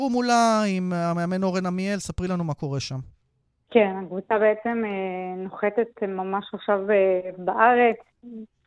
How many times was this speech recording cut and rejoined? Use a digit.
0